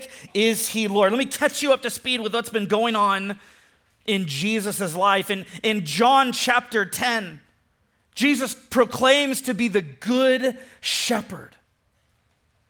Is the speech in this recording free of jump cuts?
yes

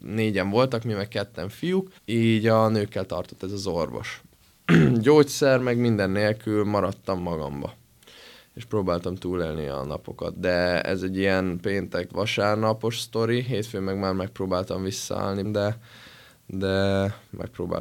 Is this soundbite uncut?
no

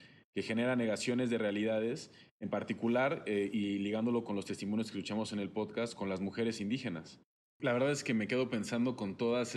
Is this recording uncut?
no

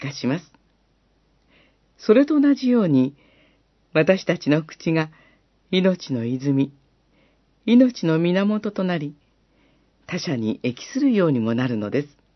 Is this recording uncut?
yes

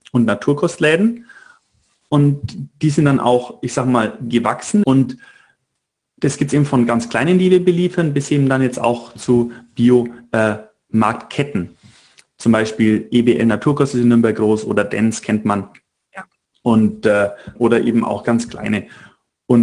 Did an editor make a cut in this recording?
yes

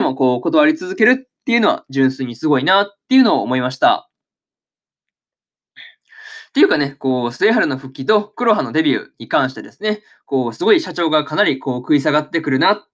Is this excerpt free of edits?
yes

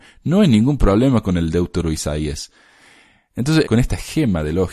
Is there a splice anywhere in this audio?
yes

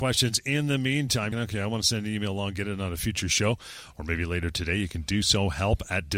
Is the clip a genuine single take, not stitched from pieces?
no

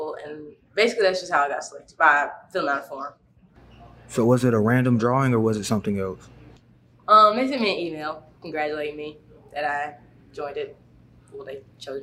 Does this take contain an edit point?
yes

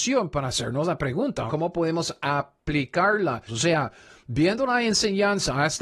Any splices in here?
yes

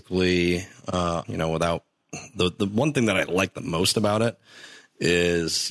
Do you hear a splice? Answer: yes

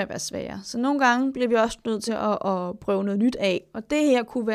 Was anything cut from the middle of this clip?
no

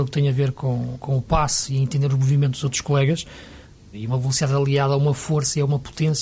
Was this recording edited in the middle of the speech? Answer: yes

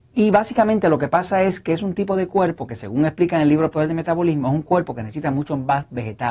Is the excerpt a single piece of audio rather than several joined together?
yes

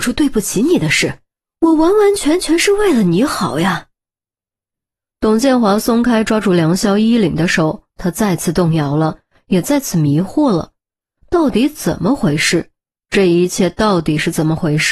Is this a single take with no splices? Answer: yes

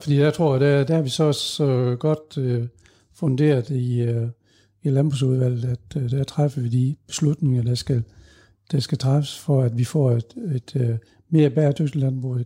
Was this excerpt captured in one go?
yes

